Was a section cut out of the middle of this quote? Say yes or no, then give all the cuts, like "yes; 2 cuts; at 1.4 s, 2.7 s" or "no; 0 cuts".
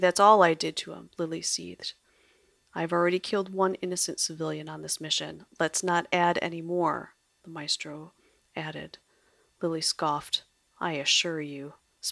no; 0 cuts